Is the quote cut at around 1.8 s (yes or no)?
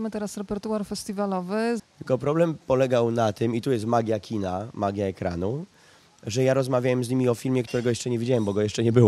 yes